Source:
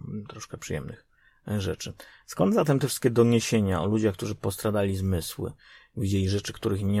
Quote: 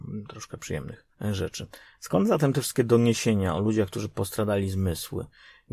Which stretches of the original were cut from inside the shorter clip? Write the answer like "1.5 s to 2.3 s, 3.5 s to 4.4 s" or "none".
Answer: 1.1 s to 1.4 s

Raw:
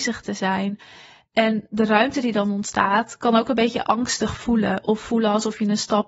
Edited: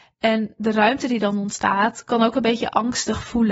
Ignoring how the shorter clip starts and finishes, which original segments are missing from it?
none

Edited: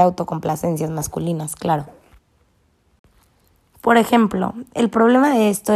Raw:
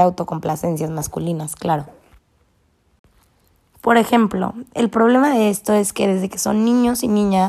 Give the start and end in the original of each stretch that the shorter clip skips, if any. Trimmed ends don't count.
none

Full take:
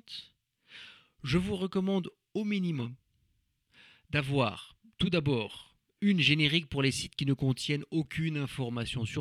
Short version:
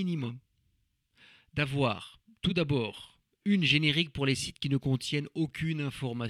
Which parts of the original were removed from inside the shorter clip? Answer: none

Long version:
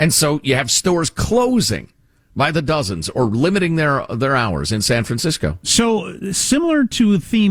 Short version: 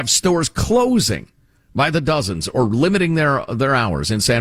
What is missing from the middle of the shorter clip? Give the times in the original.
none

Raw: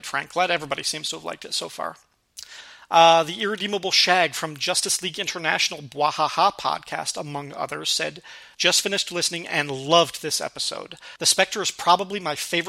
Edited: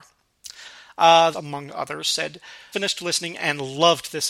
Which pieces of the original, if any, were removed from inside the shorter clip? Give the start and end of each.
3.2 s to 7.1 s, 8.5 s to 8.8 s

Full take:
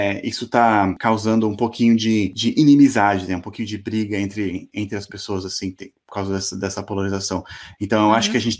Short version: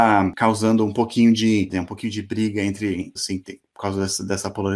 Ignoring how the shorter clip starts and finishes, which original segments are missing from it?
2.3 s to 3.3 s, 4.7 s to 5.5 s

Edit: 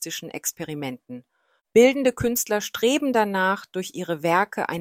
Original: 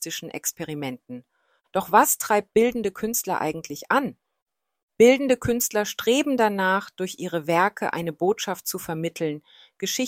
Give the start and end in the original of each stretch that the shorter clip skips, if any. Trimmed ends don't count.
1.6 s to 4.9 s

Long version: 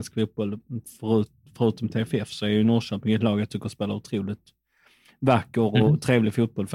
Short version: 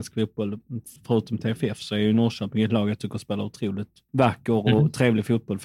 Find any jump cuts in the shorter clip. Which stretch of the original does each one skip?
1.0 s to 1.5 s, 4.6 s to 5.2 s

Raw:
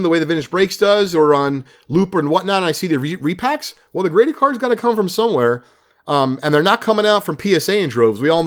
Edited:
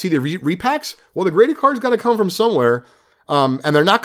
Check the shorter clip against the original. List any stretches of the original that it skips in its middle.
none

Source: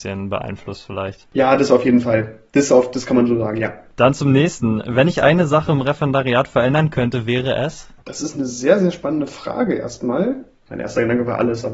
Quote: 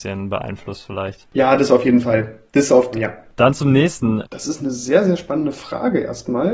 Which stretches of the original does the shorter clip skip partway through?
2.9 s to 3.5 s, 4.8 s to 8.0 s

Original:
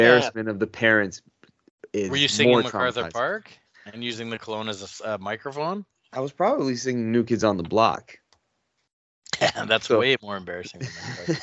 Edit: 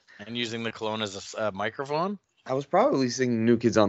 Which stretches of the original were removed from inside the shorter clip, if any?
none

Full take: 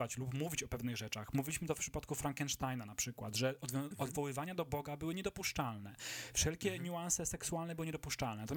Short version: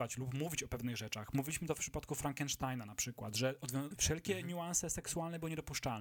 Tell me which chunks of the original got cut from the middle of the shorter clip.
4.0 s to 6.3 s

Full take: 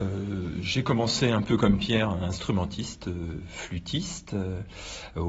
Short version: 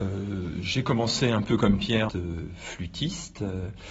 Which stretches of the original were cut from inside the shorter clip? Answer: 2.1 s to 3.0 s

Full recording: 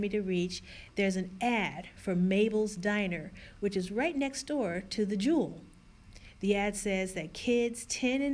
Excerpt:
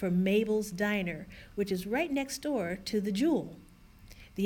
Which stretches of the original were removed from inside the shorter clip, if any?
none

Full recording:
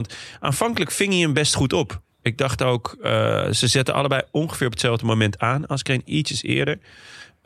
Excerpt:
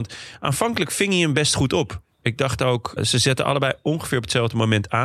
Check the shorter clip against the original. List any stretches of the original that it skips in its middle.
3.0 s to 3.5 s

